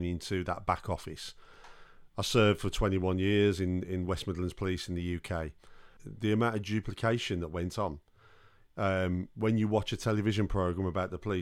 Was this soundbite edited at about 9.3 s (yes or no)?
no